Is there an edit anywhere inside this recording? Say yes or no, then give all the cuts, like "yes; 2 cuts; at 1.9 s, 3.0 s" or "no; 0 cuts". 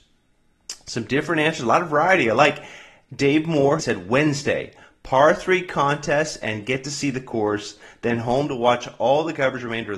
yes; 1 cut; at 3.8 s